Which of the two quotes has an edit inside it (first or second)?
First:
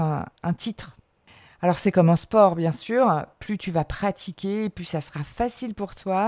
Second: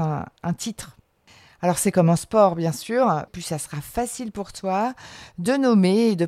second